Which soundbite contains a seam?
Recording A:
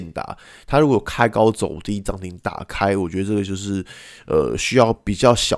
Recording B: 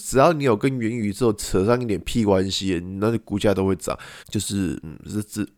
B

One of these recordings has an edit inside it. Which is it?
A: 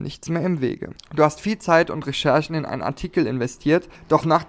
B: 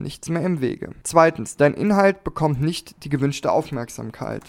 A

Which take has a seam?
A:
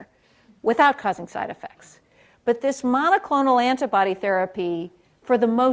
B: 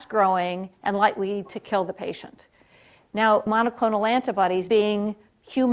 B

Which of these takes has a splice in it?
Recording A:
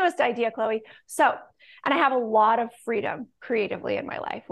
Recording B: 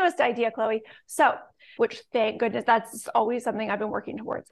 B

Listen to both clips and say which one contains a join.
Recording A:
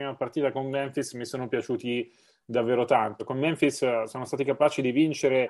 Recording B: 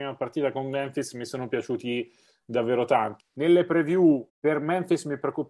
B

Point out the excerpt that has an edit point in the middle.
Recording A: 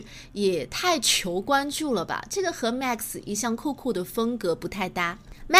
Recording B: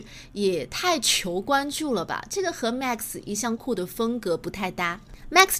B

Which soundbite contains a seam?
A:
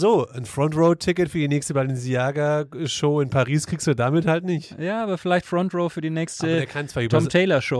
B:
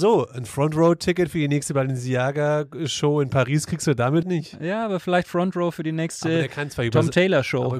B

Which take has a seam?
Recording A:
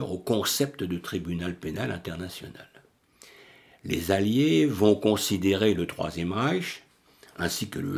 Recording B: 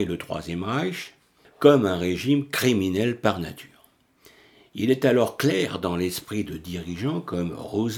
B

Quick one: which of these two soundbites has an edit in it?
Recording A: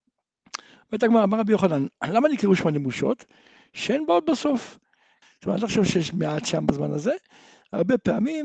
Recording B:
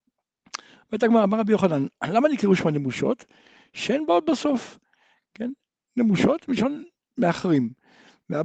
A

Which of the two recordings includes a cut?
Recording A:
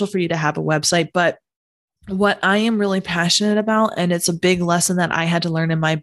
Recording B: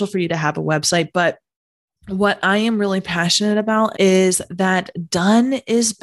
B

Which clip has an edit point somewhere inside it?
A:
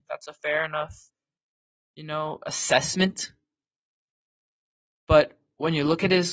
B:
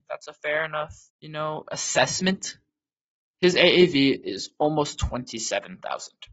B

